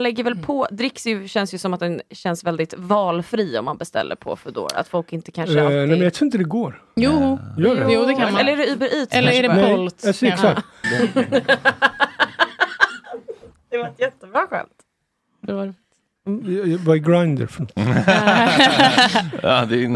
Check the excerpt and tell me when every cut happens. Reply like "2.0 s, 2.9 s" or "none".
10.8 s